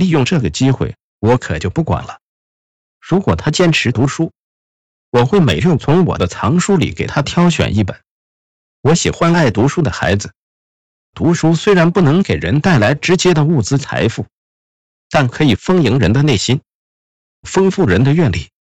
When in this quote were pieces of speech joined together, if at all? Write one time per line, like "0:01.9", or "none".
none